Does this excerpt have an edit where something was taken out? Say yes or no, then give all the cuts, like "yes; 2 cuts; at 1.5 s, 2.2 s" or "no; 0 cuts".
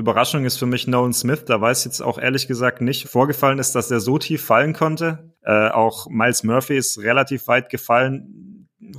yes; 2 cuts; at 3.0 s, 5.3 s